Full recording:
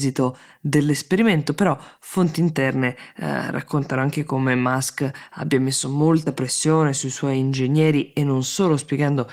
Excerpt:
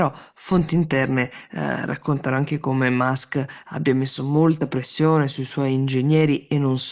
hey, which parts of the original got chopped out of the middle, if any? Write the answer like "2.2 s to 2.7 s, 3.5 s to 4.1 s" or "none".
none